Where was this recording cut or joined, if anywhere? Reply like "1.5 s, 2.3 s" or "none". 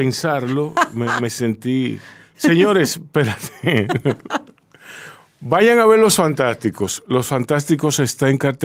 2.3 s